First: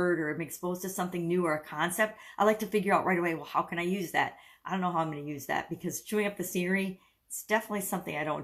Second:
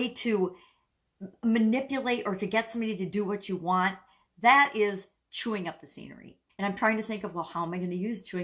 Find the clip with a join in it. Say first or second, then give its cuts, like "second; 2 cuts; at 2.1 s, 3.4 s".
second; 1 cut; at 6.5 s